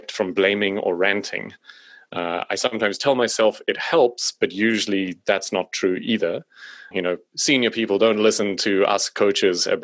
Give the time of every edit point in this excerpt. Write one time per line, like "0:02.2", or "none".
0:06.9